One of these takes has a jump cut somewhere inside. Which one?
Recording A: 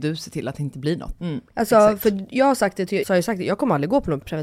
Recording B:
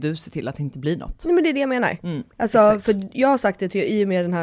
A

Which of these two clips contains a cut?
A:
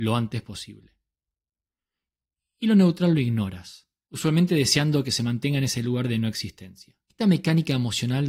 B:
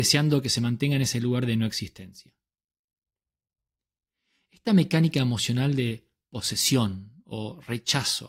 A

